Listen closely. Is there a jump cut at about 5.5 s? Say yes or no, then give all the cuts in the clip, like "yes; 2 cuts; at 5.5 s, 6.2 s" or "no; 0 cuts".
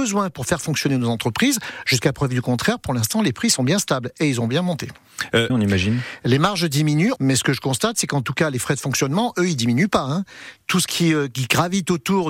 yes; 2 cuts; at 5.5 s, 7.2 s